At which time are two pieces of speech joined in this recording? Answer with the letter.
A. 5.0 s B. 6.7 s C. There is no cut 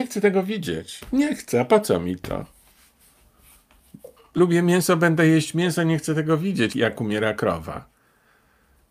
B